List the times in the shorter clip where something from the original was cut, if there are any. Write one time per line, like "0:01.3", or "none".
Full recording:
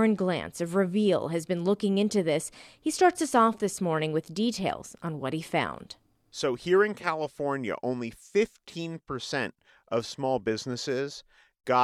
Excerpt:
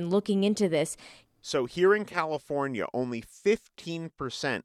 0:01.2